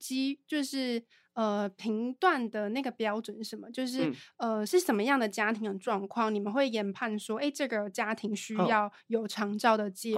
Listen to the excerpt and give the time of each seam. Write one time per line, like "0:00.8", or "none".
none